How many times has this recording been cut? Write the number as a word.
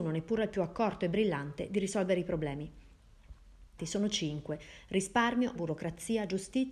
two